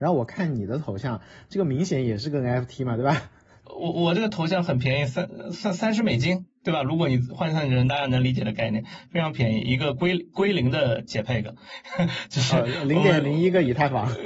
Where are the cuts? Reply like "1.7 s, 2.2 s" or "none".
3.6 s